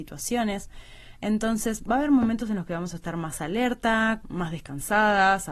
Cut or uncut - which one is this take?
cut